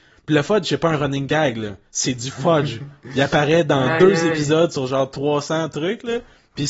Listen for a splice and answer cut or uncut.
uncut